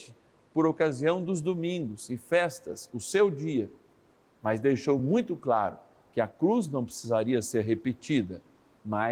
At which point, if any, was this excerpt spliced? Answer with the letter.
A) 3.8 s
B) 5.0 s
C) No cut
C